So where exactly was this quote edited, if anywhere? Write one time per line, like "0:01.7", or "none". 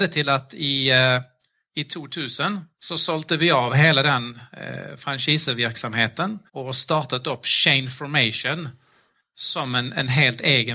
0:02.7
0:06.5

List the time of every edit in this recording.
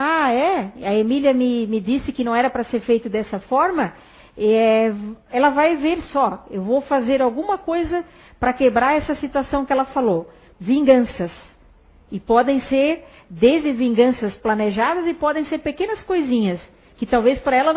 0:10.5

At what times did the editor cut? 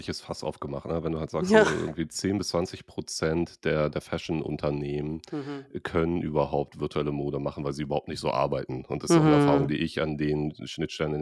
none

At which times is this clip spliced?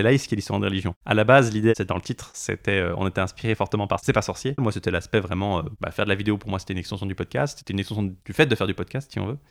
0:04.6

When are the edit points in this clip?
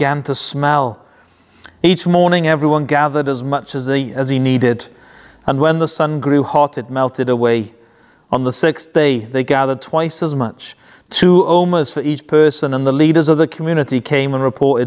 0:01.6

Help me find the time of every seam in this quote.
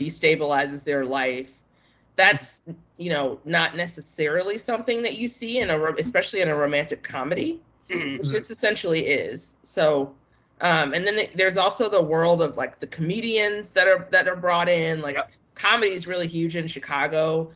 none

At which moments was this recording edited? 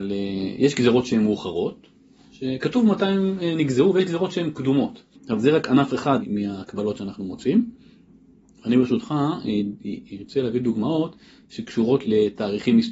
0:05.1

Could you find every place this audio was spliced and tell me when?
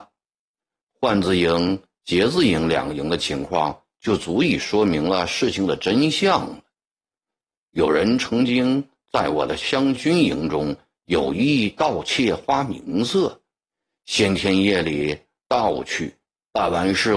0:10.0

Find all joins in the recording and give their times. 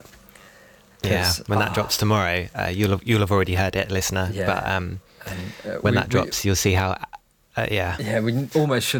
none

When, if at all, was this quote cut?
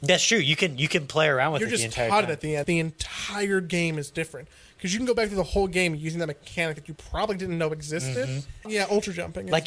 0:02.6
0:08.6

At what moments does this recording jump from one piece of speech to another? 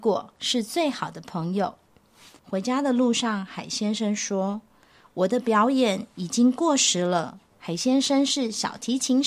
0:02.4
0:07.5

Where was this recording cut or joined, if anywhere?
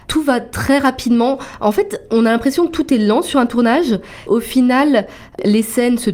0:04.3

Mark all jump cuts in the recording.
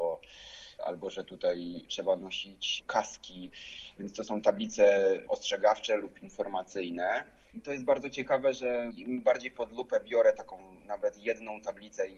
0:07.5

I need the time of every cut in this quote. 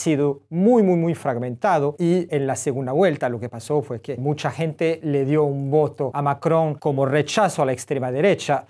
0:02.3

